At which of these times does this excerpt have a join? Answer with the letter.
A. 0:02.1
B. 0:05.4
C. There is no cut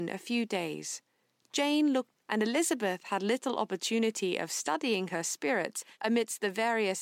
A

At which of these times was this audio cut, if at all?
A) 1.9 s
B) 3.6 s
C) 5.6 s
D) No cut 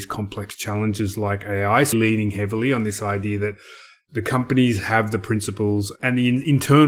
A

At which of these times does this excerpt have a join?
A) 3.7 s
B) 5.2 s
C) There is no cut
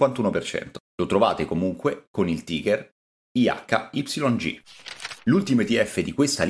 C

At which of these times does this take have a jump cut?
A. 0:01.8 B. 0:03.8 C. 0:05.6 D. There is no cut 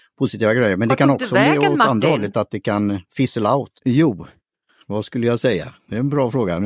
B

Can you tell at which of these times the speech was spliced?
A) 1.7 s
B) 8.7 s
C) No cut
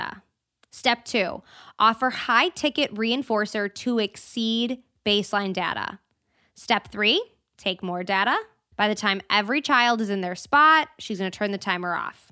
B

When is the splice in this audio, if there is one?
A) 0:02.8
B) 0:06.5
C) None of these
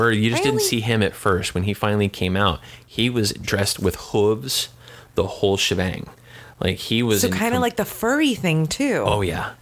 C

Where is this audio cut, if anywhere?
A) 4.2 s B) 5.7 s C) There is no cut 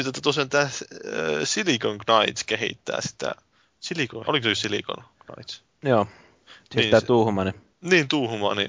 A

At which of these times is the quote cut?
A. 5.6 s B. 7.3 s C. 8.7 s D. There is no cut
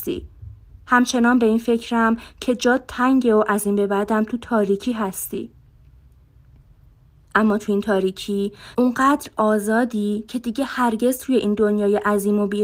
C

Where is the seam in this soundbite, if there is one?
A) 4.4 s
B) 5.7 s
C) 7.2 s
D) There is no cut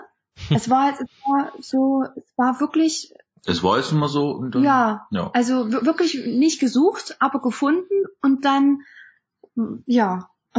D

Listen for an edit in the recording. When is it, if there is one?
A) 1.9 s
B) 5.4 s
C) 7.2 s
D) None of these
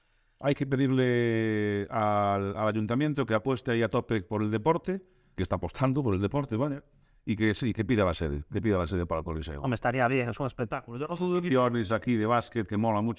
B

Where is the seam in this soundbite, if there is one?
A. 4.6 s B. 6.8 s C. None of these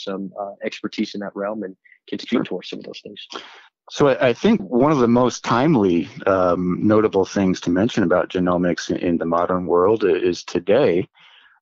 A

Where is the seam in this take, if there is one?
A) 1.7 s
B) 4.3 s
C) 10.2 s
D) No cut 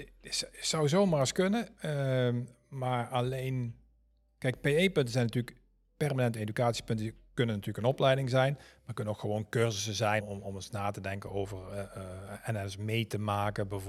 C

